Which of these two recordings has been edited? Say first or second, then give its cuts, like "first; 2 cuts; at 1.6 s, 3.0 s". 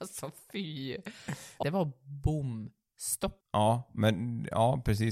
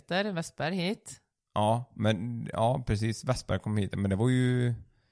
first; 2 cuts; at 1.6 s, 3.4 s